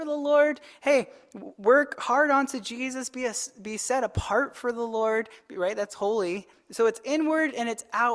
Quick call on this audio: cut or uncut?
uncut